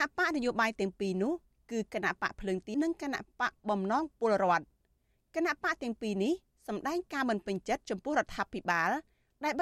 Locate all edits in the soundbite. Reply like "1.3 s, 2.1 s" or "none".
2.7 s